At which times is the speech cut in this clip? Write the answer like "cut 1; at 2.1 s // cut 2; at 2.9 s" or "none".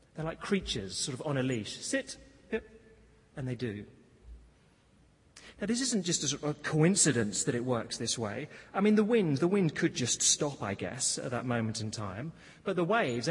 none